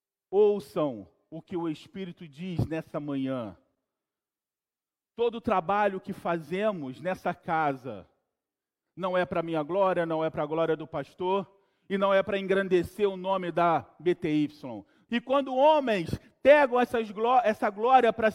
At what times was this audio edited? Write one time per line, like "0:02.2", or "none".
0:15.1